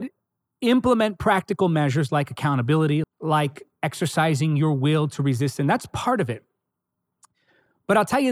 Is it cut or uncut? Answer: cut